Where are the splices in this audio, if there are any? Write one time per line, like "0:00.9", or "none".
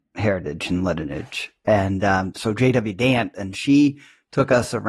none